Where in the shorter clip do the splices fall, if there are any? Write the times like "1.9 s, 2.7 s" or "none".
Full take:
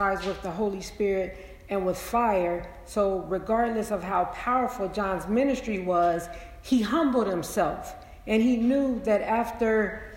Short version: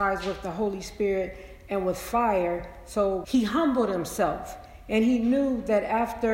3.2 s